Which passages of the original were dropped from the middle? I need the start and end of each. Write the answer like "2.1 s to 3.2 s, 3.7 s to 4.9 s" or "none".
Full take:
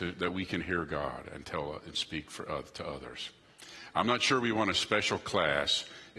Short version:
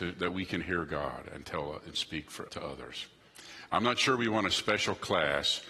2.5 s to 2.7 s